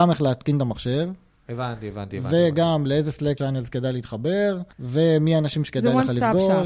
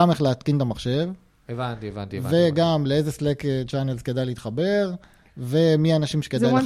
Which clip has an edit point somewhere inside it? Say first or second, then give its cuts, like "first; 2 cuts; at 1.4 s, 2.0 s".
first; 2 cuts; at 3.4 s, 4.7 s